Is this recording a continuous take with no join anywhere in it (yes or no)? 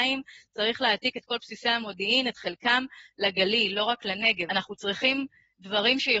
no